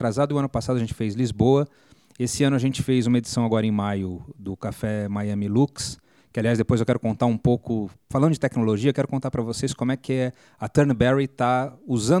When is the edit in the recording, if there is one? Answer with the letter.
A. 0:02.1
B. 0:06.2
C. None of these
C